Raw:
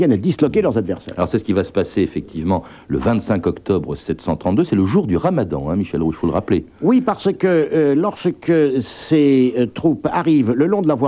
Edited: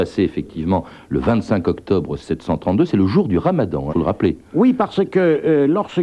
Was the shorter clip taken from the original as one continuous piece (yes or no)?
no